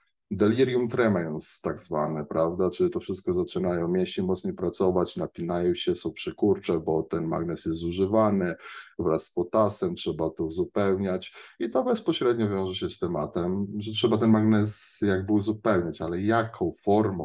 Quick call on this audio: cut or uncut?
uncut